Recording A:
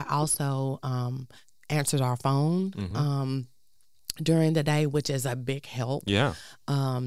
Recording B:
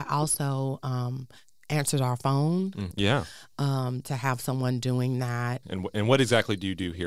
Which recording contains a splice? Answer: B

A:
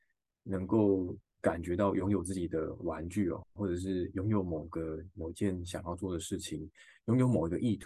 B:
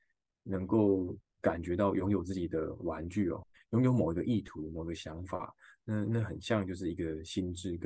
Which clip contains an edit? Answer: B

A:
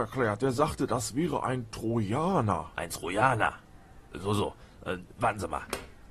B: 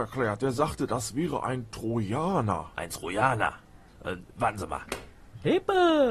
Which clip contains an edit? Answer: B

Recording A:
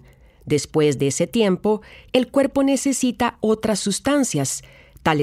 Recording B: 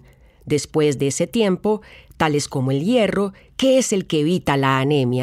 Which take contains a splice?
B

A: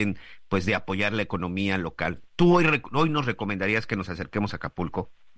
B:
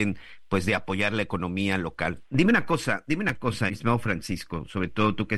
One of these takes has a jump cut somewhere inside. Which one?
B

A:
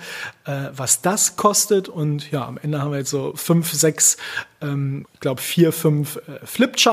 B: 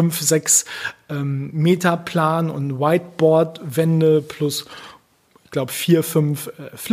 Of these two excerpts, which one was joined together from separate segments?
A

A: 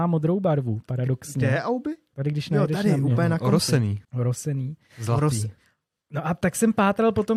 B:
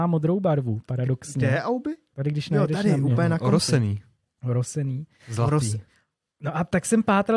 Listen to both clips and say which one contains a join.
A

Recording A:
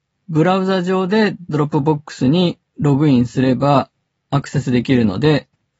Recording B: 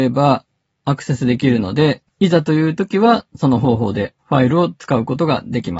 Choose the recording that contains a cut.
B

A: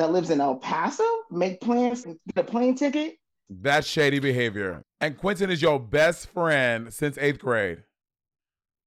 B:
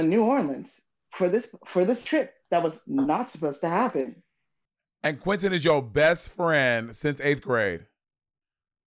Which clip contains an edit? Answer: A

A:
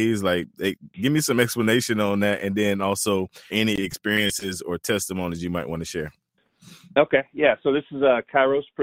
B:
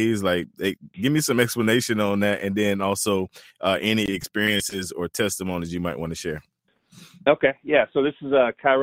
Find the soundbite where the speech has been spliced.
A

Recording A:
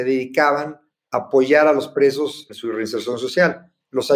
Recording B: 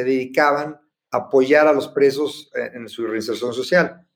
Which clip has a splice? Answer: A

